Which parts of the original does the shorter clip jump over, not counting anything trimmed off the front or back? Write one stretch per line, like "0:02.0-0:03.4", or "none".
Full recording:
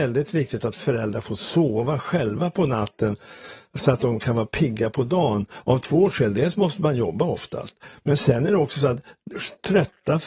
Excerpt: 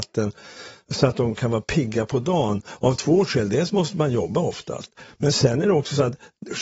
none